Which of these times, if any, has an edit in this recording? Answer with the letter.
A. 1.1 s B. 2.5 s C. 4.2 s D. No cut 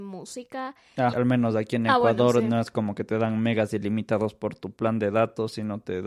A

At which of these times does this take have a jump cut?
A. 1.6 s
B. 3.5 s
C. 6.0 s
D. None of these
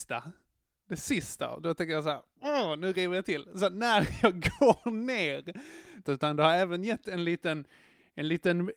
C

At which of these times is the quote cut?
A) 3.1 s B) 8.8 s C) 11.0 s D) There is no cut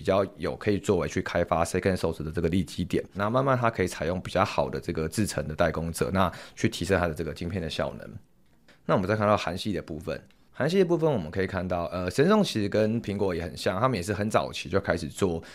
A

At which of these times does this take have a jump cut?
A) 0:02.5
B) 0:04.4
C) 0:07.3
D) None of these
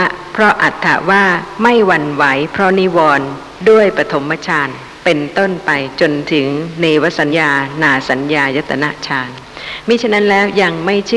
C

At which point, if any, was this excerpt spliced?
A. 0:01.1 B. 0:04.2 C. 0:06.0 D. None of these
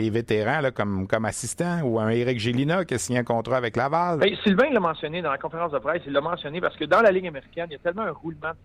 B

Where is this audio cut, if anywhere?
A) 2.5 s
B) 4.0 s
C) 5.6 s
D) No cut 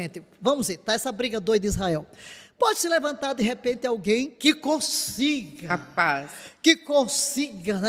D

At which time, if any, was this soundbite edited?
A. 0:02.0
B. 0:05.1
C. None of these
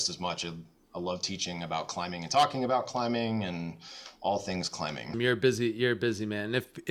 B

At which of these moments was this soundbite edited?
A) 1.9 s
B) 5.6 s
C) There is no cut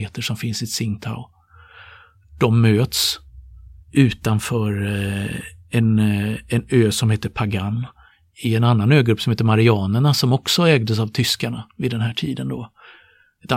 C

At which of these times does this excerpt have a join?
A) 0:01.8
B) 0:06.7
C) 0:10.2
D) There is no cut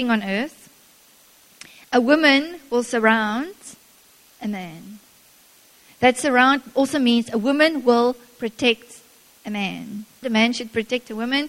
C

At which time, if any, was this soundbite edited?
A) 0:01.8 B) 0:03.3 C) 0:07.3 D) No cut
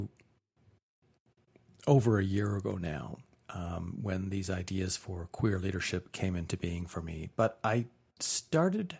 D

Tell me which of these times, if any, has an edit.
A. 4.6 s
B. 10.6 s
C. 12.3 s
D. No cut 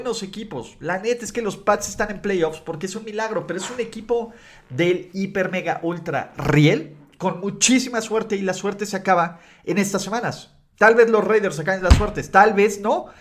D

